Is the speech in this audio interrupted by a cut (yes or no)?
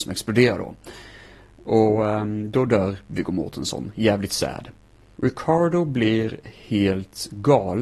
yes